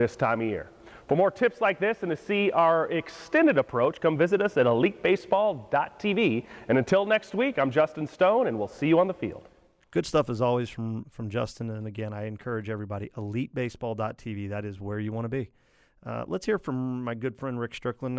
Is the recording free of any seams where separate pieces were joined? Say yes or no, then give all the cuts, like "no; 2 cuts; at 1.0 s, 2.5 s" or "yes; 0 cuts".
no; 1 cut; at 11.0 s